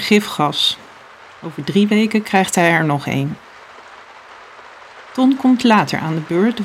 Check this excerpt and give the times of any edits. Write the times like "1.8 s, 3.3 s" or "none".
1.3 s